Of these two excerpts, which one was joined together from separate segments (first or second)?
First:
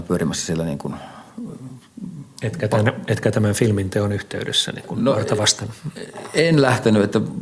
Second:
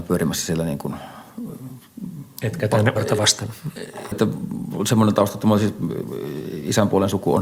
second